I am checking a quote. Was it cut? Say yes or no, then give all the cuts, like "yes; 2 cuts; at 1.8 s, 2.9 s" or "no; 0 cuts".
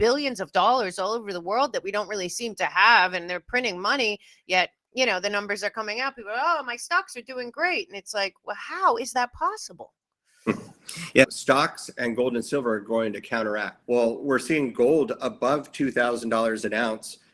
yes; 2 cuts; at 11.2 s, 13.8 s